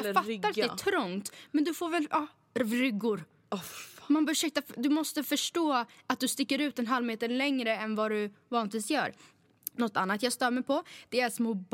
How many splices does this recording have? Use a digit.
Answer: 0